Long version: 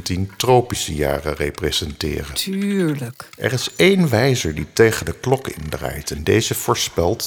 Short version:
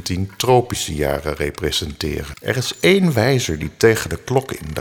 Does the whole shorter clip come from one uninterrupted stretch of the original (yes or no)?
no